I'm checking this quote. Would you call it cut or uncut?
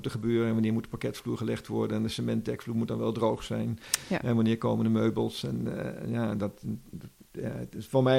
uncut